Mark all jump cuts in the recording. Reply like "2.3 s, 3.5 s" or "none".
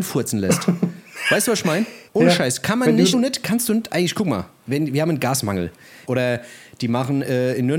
2.1 s, 3.1 s, 6.1 s